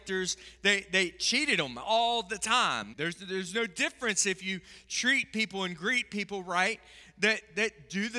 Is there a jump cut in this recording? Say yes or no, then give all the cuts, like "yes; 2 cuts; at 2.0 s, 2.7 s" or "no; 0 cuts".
yes; 1 cut; at 2.9 s